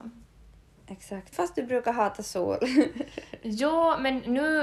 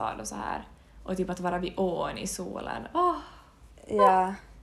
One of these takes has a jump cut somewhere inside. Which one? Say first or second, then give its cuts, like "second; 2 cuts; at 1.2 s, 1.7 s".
first; 1 cut; at 1.3 s